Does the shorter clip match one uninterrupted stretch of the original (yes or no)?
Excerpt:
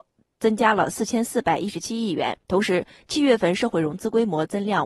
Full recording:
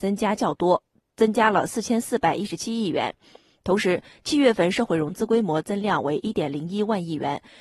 no